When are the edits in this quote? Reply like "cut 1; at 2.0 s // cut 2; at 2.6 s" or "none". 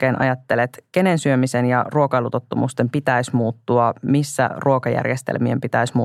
none